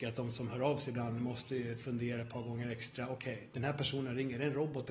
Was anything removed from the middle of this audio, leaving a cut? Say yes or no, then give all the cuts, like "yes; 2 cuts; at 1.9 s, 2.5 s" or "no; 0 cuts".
no; 0 cuts